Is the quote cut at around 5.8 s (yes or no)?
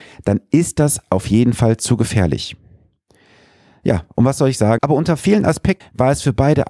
yes